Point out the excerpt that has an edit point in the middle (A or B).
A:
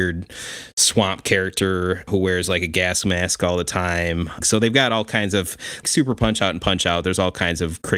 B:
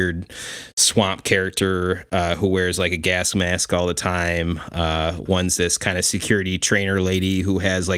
A